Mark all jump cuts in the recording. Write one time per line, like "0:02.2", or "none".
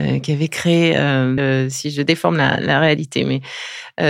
0:01.4